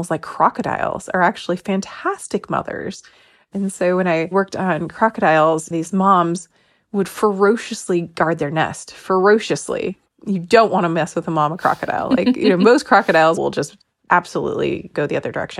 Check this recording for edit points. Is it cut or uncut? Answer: cut